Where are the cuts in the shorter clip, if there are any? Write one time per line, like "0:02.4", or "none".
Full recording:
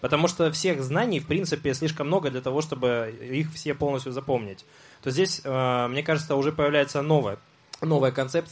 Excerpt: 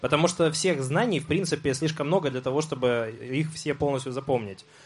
none